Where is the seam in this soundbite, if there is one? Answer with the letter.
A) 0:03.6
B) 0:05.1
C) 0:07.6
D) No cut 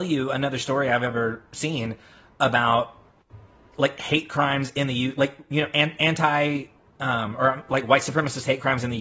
D